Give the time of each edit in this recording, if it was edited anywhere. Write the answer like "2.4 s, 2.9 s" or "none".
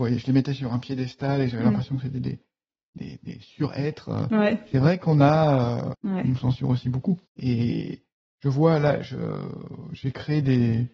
5.9 s, 7.3 s